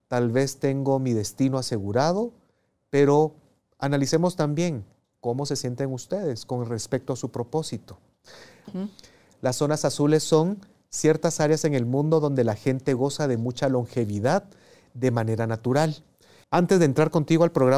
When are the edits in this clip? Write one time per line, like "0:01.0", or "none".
0:08.7
0:16.4